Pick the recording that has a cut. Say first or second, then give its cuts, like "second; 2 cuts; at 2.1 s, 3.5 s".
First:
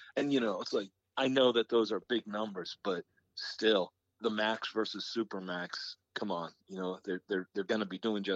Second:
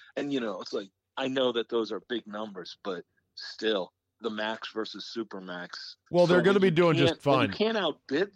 second; 1 cut; at 6.1 s